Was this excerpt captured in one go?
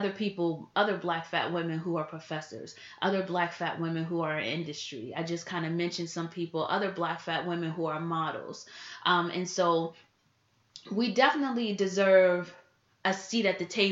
yes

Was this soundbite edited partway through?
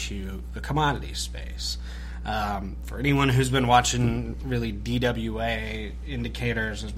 no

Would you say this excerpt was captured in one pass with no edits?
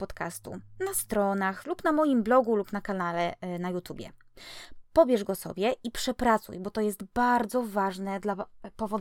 no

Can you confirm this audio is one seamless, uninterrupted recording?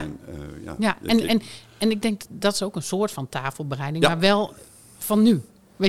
yes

